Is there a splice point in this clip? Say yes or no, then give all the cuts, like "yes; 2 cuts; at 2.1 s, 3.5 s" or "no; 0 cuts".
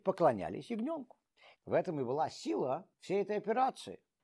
yes; 2 cuts; at 1.6 s, 2.9 s